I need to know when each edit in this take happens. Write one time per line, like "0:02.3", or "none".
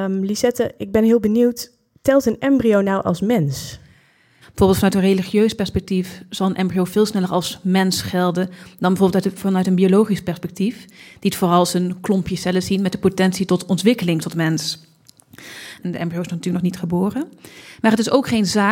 0:04.4
0:15.8